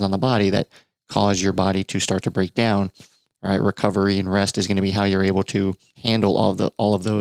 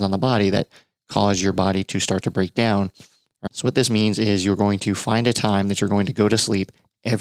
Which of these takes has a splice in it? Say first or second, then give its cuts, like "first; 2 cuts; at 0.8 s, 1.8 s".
second; 1 cut; at 3.5 s